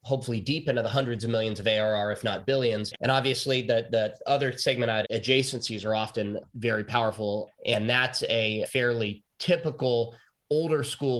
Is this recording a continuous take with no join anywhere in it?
no; 3 cuts; at 2.9 s, 5.0 s, 7.5 s

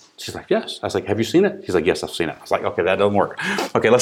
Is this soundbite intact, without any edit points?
yes; 0 cuts

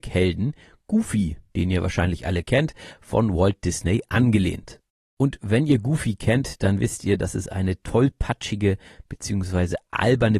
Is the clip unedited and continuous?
yes; 0 cuts

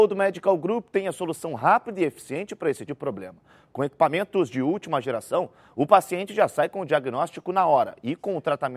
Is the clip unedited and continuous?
no; 1 cut; at 2.9 s

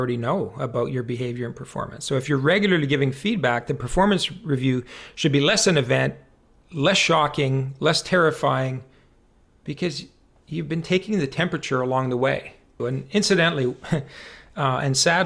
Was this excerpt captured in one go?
no; 1 cut; at 12.8 s

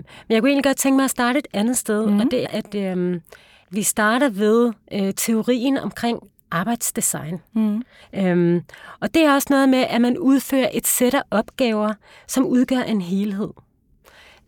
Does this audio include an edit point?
yes; 2 cuts; at 2.4 s, 8.0 s

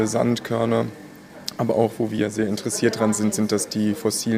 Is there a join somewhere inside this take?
no; 0 cuts

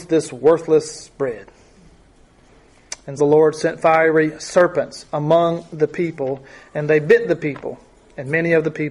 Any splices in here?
yes; 1 cut; at 3.2 s

